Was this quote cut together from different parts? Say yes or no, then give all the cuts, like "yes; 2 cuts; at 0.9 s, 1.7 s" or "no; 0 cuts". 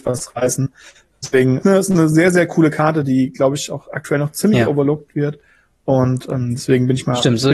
no; 0 cuts